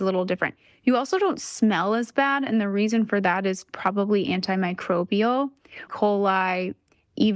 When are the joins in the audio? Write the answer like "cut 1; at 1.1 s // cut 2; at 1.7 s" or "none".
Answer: cut 1; at 5.9 s